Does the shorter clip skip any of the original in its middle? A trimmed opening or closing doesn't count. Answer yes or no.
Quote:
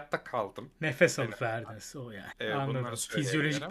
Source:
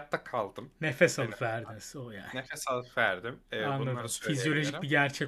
yes